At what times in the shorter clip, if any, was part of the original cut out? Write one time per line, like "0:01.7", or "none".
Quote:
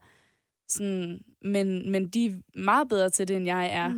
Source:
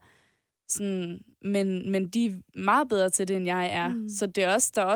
none